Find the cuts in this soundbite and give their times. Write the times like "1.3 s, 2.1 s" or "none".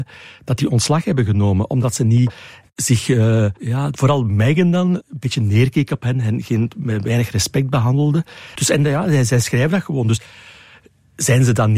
8.6 s